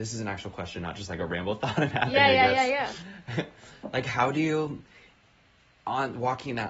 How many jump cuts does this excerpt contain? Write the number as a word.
zero